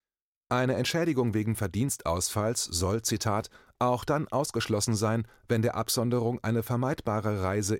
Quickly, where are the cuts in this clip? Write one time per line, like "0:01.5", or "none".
none